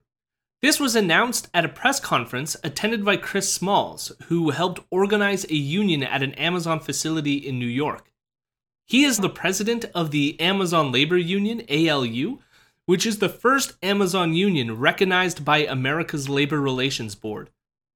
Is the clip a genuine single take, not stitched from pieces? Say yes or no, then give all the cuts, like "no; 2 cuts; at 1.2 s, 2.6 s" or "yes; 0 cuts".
no; 1 cut; at 9.2 s